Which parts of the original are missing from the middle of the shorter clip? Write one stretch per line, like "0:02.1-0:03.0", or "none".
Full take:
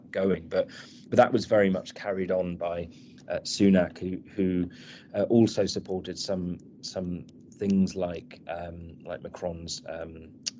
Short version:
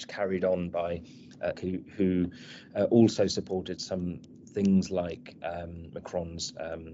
0:03.4-0:03.9
0:06.1-0:06.8
0:09.0-0:09.2